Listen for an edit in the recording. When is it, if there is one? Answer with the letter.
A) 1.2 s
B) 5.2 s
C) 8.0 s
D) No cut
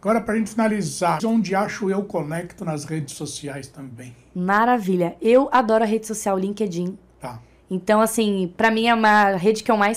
A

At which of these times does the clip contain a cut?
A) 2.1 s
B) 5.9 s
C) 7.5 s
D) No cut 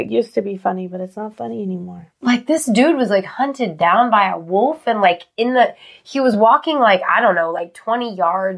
D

